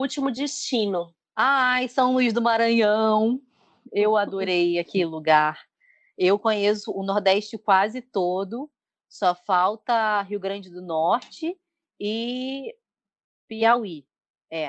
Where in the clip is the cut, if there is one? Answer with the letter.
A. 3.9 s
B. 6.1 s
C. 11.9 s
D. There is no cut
D